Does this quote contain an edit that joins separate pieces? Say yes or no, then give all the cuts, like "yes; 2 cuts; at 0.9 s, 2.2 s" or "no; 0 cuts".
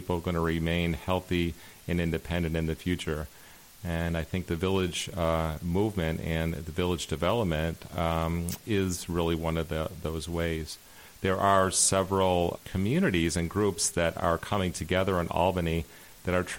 yes; 1 cut; at 12.6 s